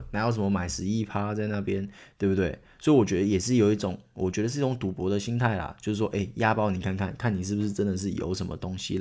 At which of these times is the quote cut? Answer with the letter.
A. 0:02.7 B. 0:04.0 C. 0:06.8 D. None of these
D